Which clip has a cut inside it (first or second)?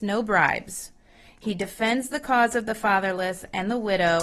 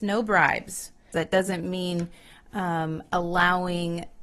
second